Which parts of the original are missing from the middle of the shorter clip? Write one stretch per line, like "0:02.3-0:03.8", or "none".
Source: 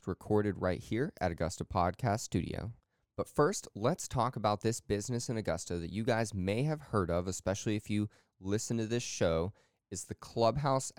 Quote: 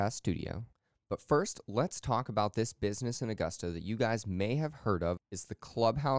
0:07.2-0:09.8